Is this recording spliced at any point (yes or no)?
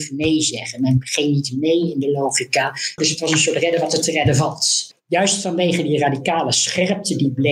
yes